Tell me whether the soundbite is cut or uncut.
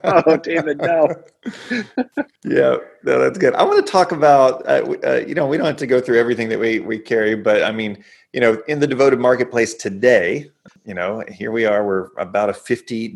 cut